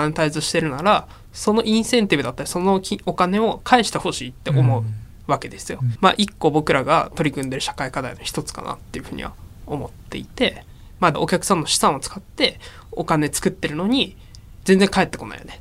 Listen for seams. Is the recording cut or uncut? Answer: cut